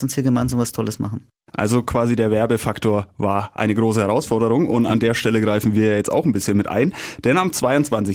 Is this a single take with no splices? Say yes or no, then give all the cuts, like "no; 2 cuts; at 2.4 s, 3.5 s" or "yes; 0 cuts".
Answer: yes; 0 cuts